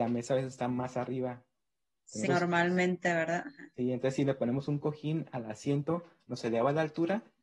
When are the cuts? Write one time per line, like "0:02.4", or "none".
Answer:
0:02.3